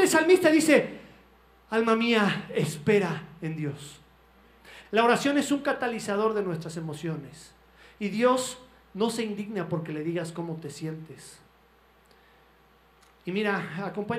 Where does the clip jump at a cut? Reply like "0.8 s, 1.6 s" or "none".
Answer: 4.8 s